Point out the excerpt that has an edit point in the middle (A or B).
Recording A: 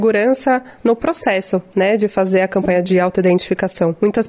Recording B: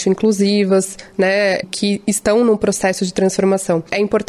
B